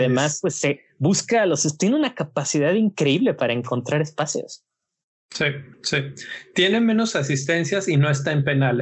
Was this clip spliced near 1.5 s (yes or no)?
no